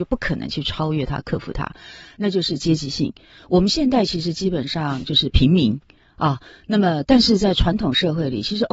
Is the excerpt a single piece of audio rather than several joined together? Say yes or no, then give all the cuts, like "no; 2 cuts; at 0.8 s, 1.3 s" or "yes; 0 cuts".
yes; 0 cuts